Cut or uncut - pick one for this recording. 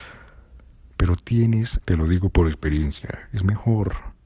cut